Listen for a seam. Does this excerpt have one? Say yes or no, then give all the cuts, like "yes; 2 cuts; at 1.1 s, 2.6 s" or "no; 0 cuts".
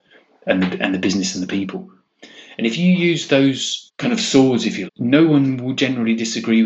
yes; 1 cut; at 4.9 s